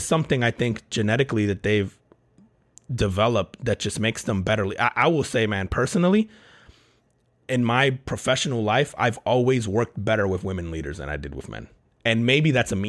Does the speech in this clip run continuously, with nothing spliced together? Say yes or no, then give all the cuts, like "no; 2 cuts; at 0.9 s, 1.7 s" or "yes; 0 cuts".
yes; 0 cuts